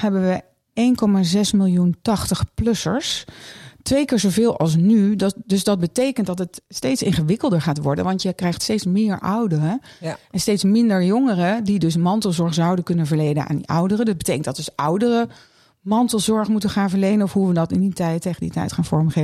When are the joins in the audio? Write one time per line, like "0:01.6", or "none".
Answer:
none